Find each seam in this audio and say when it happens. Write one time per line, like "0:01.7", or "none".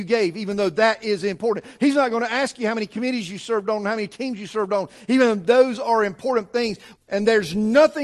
0:07.0

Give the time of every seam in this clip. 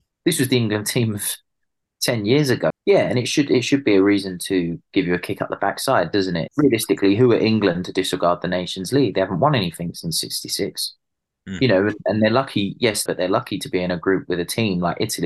0:02.7
0:06.5
0:13.1

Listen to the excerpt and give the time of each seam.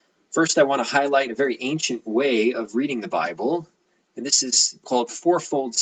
0:04.8

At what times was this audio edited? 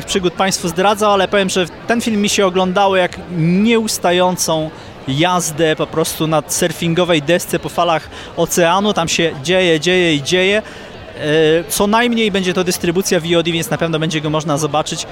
0:09.4
0:11.7

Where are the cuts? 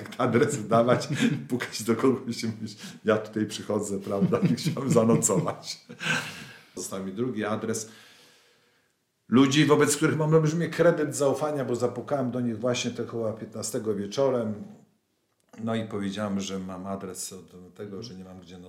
0:06.8

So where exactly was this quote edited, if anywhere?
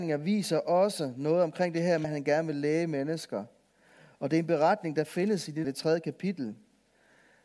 0:02.0
0:05.6

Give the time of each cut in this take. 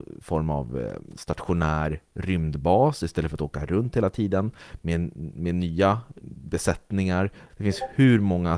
0:06.2
0:07.5

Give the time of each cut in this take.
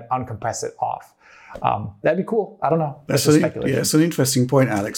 none

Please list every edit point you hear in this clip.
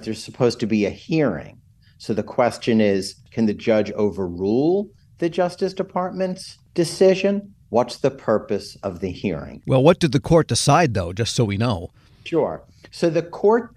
0:09.6

